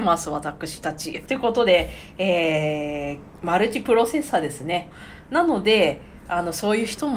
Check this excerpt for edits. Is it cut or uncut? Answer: cut